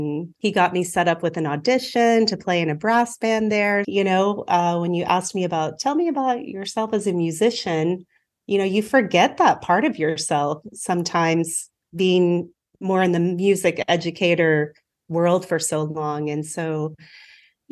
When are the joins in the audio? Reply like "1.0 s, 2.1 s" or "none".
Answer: 3.8 s